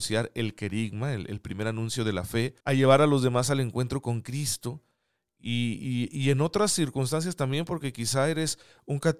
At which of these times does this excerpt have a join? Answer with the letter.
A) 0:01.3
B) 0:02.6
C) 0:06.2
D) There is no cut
B